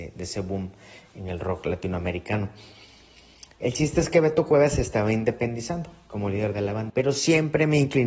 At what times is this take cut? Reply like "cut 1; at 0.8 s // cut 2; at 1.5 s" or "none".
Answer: cut 1; at 6.9 s